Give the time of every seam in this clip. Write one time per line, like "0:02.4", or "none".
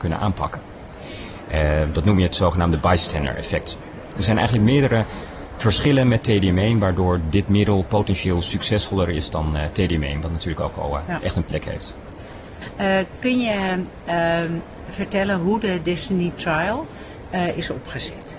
none